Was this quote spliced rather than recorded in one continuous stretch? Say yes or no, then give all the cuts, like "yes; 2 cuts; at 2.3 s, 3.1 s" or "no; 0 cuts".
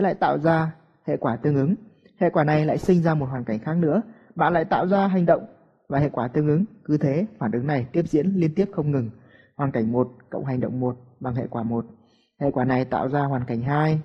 no; 0 cuts